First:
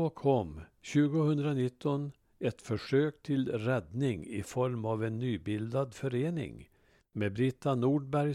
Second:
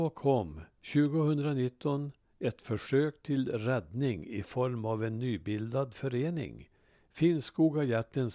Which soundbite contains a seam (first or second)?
first